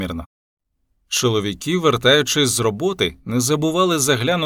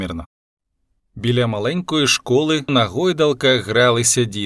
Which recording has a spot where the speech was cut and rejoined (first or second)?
second